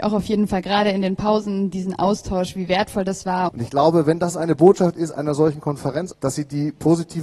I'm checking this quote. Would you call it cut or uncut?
cut